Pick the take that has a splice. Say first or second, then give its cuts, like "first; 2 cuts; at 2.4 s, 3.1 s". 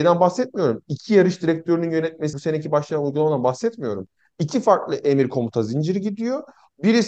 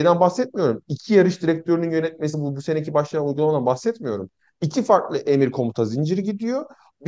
first; 1 cut; at 2.3 s